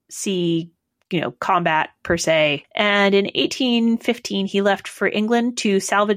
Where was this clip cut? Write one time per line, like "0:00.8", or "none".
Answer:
0:02.6